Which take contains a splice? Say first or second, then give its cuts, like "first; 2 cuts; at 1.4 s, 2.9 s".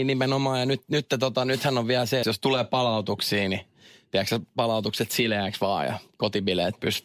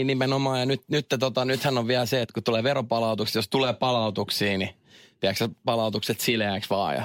first; 1 cut; at 2.2 s